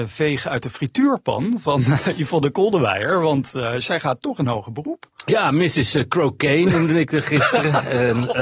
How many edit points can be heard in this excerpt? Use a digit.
0